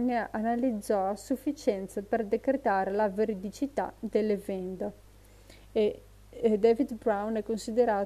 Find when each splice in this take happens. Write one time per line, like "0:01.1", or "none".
none